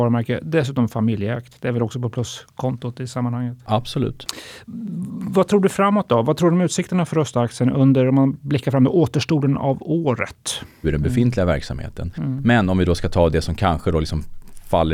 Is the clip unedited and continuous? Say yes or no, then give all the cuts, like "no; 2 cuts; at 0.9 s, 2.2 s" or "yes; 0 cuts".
no; 1 cut; at 10.8 s